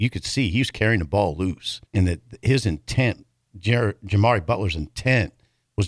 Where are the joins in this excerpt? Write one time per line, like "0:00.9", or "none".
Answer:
0:01.8